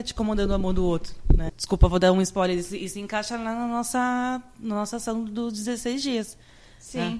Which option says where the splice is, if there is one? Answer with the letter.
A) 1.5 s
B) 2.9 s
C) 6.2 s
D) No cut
A